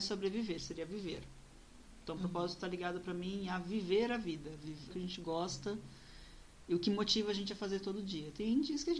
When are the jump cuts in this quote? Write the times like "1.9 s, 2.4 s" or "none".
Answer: 4.9 s